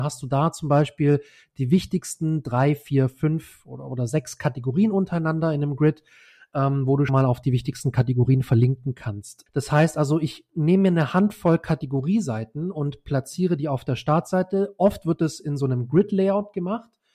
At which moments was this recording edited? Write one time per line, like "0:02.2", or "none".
0:07.1
0:09.5